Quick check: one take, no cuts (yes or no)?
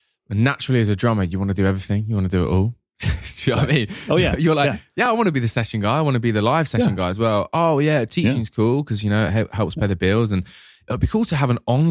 yes